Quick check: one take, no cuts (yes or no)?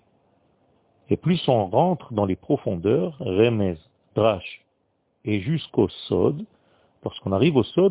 yes